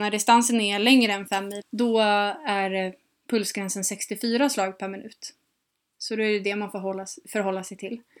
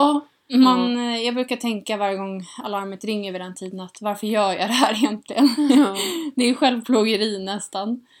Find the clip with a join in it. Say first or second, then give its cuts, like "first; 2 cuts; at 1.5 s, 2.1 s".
first; 1 cut; at 1.6 s